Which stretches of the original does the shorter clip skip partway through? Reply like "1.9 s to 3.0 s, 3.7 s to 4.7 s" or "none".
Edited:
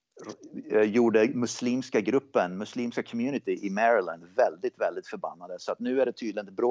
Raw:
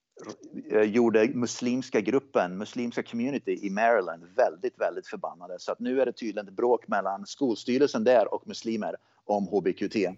none